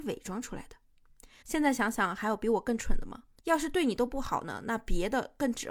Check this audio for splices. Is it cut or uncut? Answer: cut